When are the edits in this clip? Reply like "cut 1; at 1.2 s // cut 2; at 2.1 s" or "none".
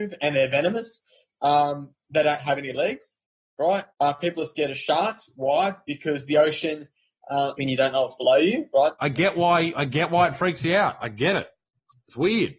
cut 1; at 3.9 s // cut 2; at 7.6 s // cut 3; at 8.9 s